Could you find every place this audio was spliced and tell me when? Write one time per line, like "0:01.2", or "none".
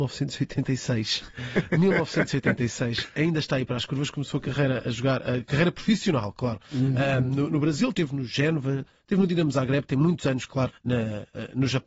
0:07.9
0:10.7